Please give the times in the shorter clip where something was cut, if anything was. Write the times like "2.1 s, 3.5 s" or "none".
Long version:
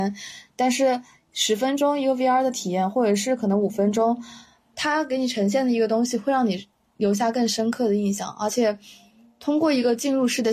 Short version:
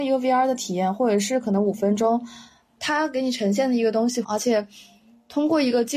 4.2 s

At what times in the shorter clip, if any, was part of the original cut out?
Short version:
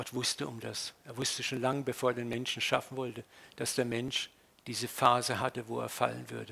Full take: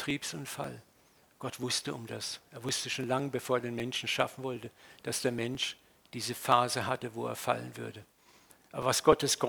none

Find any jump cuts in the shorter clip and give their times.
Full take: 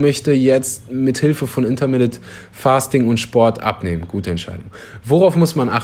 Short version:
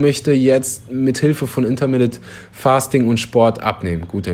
none

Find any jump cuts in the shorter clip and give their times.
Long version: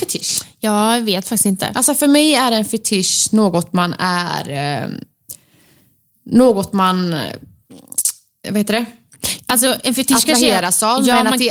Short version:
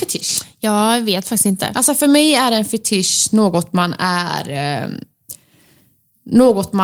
none

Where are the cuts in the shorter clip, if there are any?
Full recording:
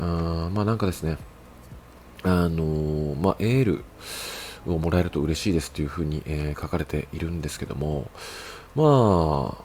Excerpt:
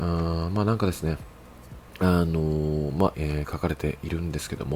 1.9 s, 3.1 s

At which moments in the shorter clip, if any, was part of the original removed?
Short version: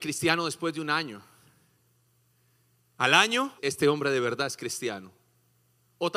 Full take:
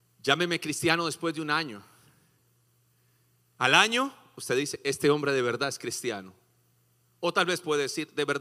3.6 s

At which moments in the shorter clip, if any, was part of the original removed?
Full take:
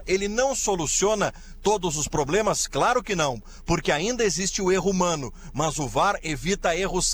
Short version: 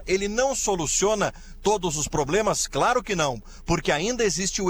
none

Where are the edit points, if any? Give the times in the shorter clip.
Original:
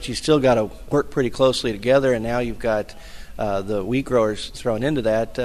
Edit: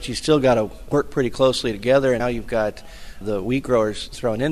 2.2 s, 3.2 s

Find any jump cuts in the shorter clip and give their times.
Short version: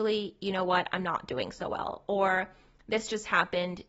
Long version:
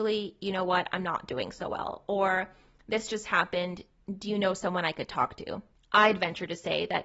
none

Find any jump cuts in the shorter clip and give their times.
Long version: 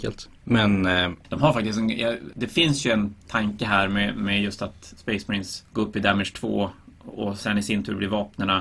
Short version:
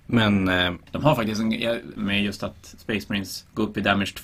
2.0 s

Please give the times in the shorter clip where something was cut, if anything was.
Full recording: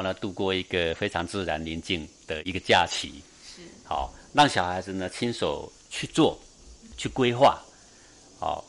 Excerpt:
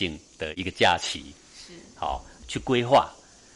2.4 s

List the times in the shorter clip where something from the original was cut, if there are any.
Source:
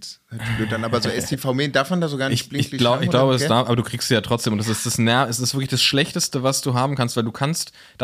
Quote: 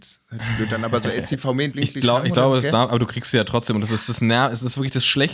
1.7 s

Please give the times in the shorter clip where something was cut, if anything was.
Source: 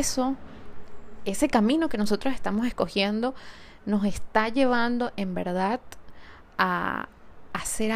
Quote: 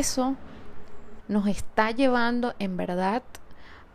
1.2 s

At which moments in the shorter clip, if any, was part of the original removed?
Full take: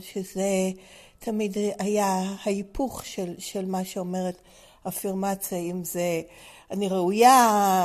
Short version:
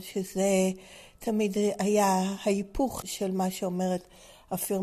3.0 s

